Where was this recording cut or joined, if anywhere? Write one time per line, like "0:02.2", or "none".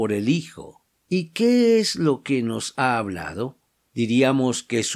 0:03.9

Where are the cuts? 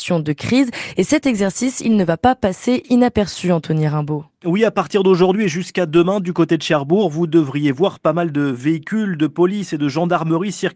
none

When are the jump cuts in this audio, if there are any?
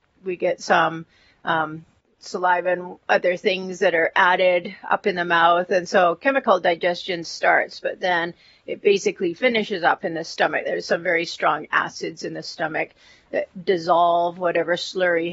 none

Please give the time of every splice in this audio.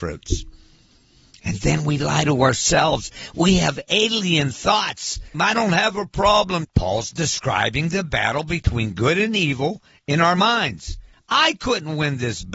0:05.3
0:06.6
0:11.1

